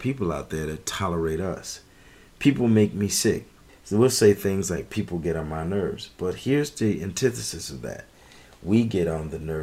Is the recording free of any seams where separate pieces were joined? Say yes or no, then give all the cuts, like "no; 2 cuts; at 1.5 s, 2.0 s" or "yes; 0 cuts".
no; 1 cut; at 3.7 s